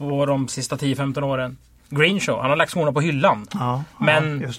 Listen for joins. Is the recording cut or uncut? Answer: uncut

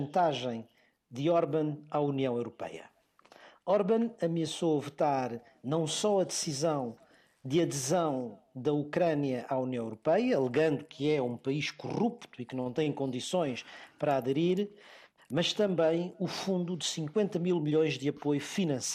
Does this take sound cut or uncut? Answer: uncut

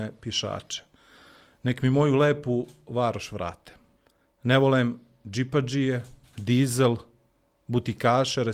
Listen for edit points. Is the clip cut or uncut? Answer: uncut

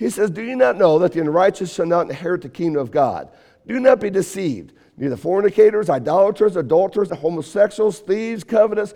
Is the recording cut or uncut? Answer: cut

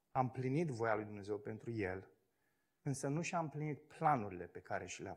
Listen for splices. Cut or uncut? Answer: cut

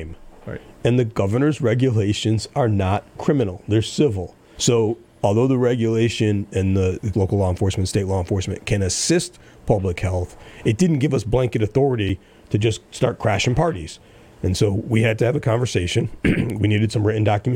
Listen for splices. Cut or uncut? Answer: cut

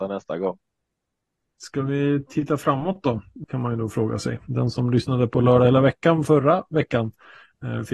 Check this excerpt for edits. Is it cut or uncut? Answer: cut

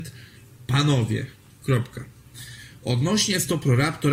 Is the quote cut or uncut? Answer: uncut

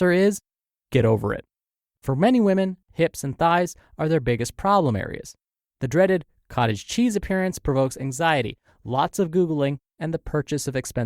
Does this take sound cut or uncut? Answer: cut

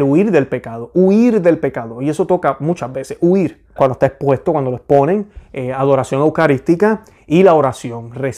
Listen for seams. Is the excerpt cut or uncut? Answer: cut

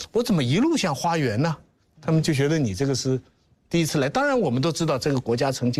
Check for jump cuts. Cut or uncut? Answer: uncut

